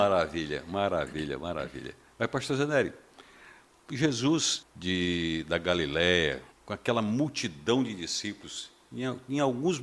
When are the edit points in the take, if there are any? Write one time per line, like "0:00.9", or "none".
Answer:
0:04.6
0:06.5